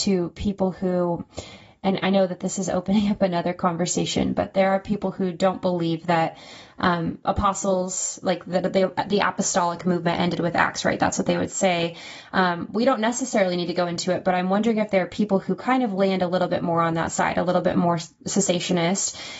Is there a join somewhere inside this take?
no; 0 cuts

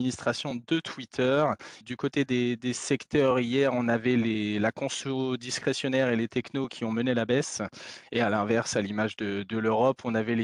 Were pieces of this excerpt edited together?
yes; 1 cut; at 1.8 s

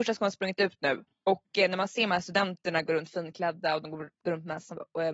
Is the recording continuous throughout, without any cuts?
yes; 0 cuts

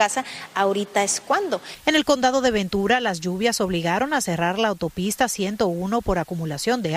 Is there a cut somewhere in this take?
no; 0 cuts

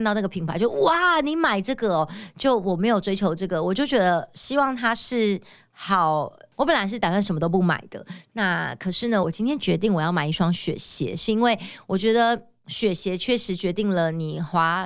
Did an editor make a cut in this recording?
yes; 2 cuts; at 6.5 s, 9.2 s

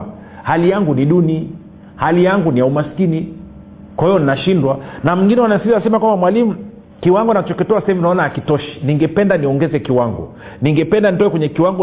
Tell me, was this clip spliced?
yes; 1 cut; at 6.9 s

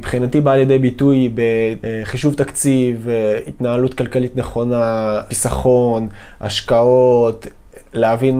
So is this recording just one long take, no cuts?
yes; 0 cuts

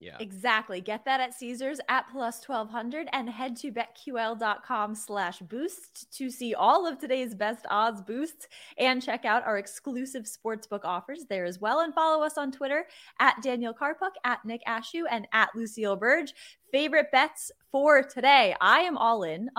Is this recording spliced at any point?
no; 0 cuts

